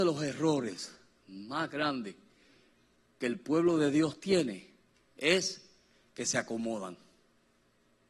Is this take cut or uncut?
uncut